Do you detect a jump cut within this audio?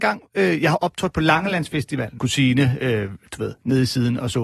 yes; 1 cut; at 2.2 s

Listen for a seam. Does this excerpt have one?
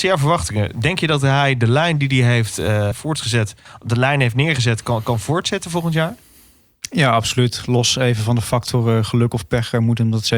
yes; 1 cut; at 2.9 s

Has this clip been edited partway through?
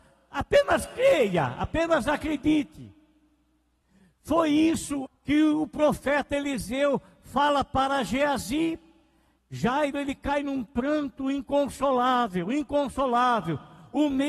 yes; 2 cuts; at 5.1 s, 9.4 s

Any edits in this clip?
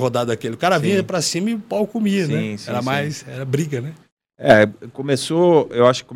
no; 0 cuts

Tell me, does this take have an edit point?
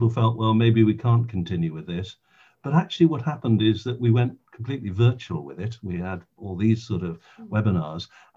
no; 0 cuts

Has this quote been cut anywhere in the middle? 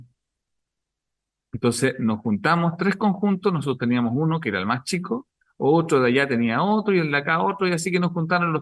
no; 0 cuts

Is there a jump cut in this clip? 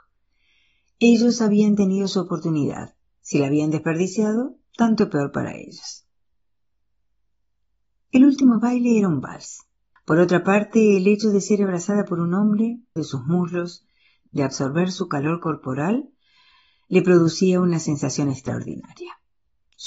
yes; 2 cuts; at 9.9 s, 13.0 s

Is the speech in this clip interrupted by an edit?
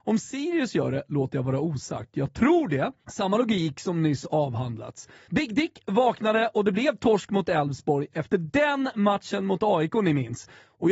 yes; 1 cut; at 5.3 s

